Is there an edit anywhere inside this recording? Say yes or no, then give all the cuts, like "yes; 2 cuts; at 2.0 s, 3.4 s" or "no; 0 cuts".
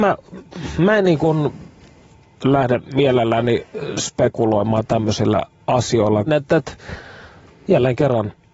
yes; 1 cut; at 6.3 s